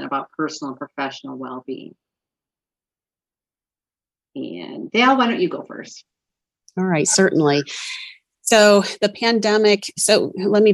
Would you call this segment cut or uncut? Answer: uncut